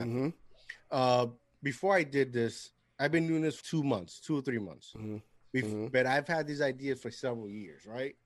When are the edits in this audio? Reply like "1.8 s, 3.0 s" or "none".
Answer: 3.6 s